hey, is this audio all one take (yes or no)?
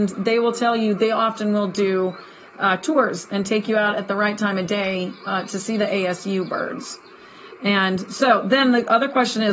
yes